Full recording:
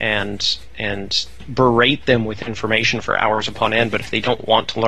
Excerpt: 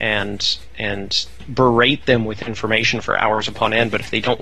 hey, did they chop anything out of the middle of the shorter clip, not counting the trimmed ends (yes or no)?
no